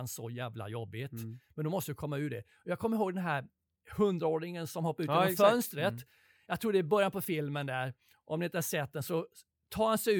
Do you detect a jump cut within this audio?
no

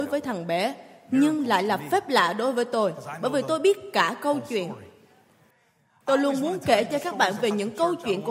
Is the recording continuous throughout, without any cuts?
yes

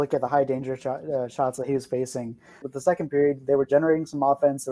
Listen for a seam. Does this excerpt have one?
yes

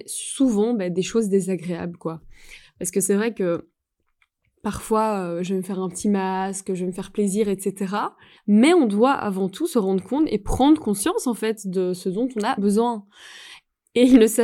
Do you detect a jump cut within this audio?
yes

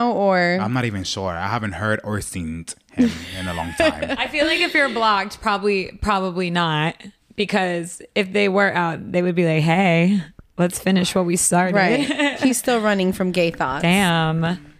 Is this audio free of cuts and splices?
yes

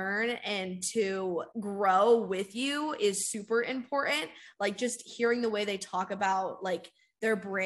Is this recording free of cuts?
no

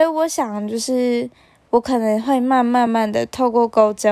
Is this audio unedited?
no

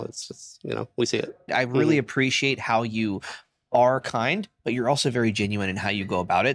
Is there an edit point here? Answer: yes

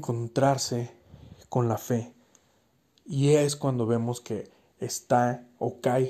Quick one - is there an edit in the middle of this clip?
no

